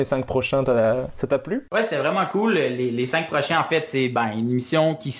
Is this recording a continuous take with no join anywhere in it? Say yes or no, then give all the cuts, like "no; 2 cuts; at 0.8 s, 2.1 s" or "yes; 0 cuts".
yes; 0 cuts